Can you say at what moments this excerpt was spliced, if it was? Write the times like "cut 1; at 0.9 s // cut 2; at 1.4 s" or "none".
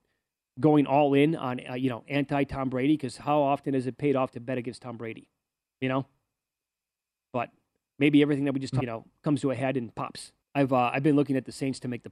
cut 1; at 8.8 s // cut 2; at 10.4 s